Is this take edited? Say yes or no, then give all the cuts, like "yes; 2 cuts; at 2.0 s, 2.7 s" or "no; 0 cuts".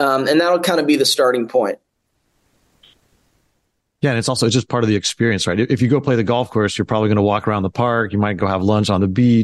no; 0 cuts